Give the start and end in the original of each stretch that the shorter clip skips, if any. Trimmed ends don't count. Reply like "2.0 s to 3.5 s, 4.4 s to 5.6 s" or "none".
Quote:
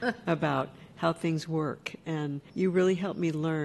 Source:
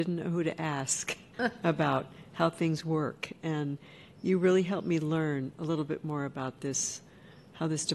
3.9 s to 4.2 s